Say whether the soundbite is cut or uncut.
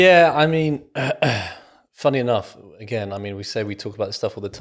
uncut